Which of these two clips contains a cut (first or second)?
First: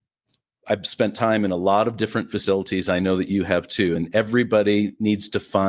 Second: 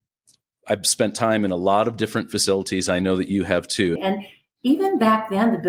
second